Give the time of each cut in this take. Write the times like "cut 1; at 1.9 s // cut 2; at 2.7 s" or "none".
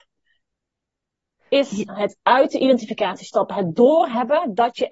cut 1; at 1.9 s

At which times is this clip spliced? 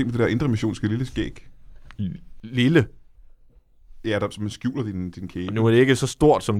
none

